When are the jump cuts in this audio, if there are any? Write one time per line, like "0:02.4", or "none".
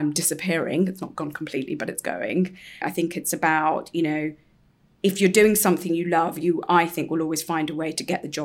0:02.8